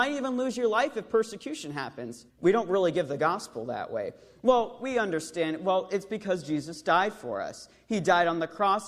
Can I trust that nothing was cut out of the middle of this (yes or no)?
no